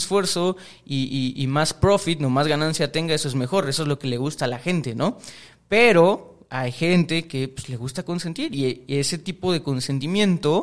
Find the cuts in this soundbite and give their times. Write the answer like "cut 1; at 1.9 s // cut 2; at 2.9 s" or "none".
none